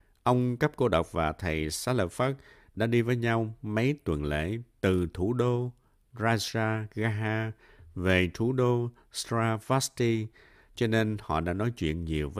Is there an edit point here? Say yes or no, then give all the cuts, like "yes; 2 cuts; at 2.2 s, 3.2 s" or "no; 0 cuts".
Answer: no; 0 cuts